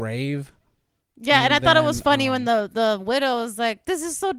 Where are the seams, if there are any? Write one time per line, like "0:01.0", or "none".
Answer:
none